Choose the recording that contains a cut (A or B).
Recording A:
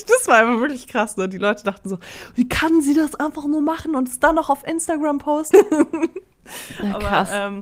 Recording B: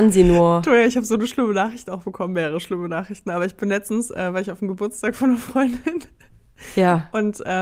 A